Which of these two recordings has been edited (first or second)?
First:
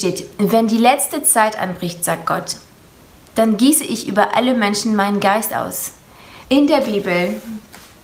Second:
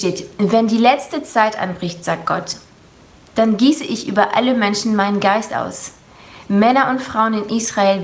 first